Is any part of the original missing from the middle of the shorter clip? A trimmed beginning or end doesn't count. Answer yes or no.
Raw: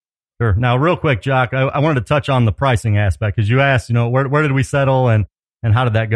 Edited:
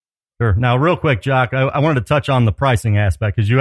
no